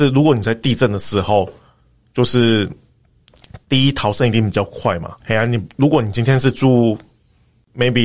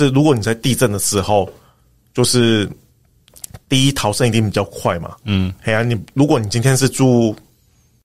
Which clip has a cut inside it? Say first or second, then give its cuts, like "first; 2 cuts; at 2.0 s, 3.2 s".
first; 1 cut; at 5.2 s